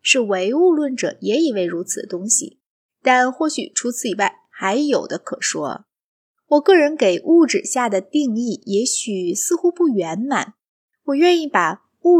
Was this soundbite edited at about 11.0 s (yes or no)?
no